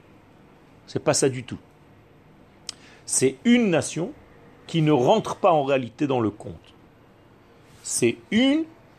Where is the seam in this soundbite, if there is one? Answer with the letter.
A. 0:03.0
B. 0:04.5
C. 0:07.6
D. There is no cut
D